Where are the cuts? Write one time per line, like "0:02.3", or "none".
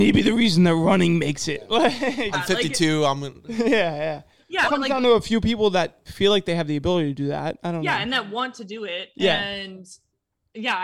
0:02.3
0:04.6